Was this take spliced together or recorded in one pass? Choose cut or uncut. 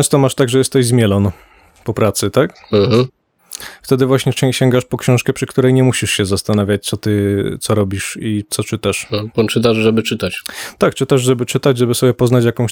uncut